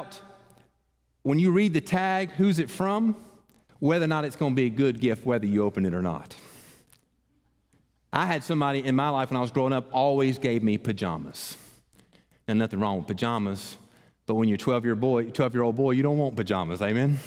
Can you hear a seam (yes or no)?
no